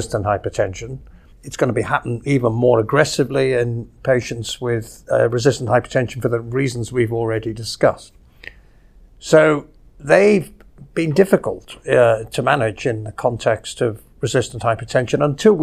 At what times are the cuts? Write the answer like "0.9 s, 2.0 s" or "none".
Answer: 1.3 s

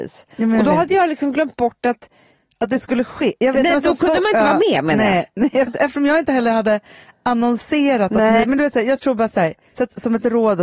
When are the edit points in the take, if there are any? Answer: 5.7 s, 8.4 s

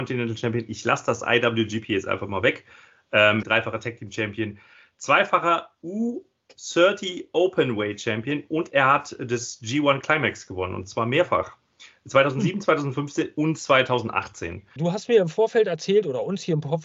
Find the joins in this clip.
3.4 s, 14.8 s

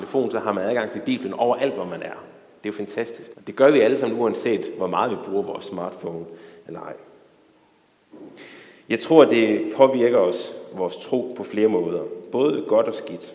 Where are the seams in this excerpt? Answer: 3.3 s

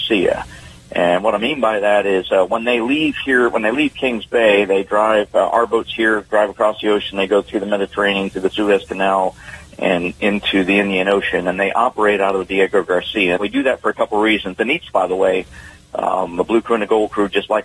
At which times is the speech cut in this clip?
13.4 s, 14.9 s

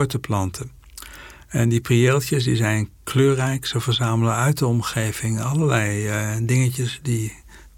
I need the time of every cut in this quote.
none

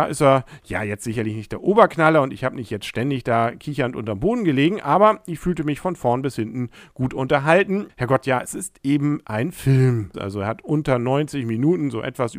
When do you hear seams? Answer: 7.9 s, 10.1 s

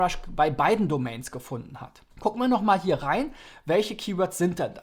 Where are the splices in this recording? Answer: 2.1 s

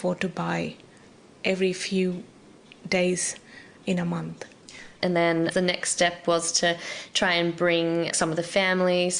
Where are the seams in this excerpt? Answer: 5.0 s

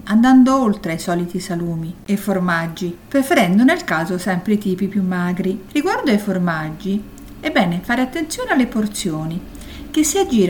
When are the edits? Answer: 3.0 s

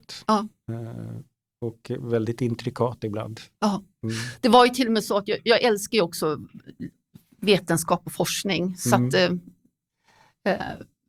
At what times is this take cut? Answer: none

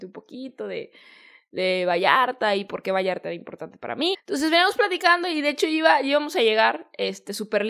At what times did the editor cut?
4.1 s

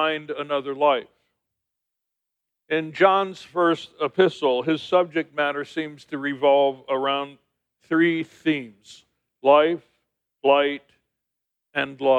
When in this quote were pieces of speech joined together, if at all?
2.5 s

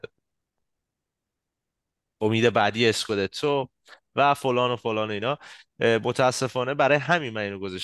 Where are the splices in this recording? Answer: none

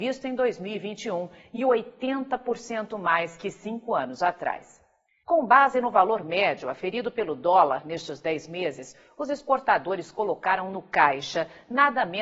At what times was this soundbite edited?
5.2 s

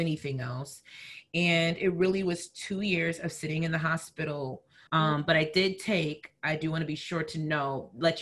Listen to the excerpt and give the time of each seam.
4.9 s

